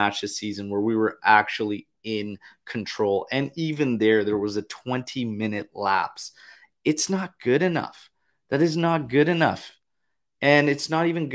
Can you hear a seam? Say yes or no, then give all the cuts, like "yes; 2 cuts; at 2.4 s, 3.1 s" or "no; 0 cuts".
no; 0 cuts